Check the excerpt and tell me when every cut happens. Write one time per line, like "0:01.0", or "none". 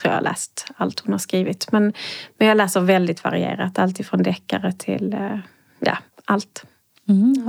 none

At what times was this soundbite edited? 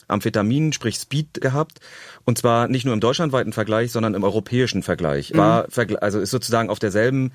0:01.4
0:05.3

